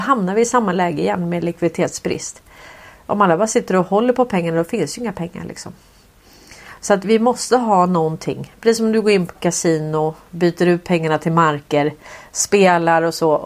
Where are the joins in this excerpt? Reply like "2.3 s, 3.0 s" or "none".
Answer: 7.0 s